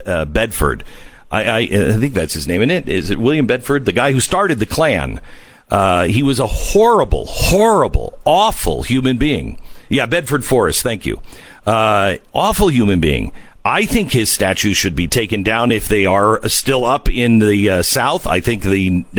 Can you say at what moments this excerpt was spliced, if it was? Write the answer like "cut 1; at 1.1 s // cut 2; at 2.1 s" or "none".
none

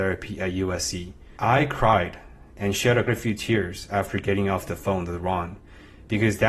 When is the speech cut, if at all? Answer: cut 1; at 1.4 s // cut 2; at 3.1 s

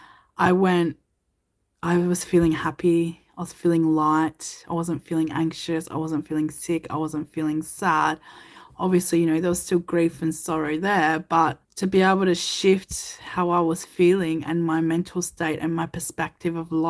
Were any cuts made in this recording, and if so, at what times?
cut 1; at 11.6 s

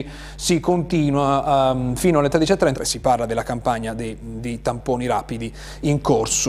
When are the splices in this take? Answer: cut 1; at 2.7 s

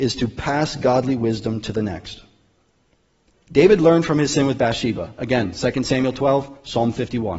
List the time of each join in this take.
none

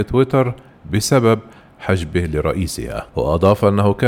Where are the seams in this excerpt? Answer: cut 1; at 3.1 s

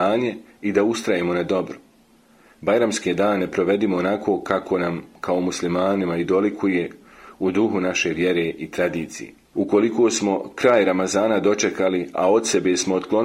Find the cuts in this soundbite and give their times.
cut 1; at 9.5 s

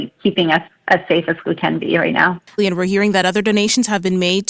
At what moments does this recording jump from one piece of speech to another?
cut 1; at 2.6 s

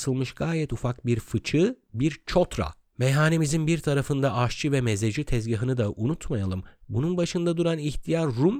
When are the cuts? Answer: cut 1; at 2.9 s

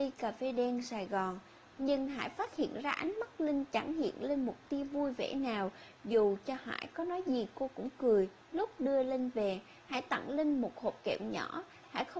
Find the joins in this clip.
cut 1; at 1.6 s // cut 2; at 8.4 s

